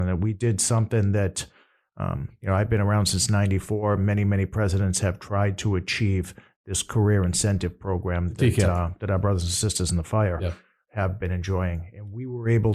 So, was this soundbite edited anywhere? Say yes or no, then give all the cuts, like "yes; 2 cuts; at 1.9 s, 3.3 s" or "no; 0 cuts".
no; 0 cuts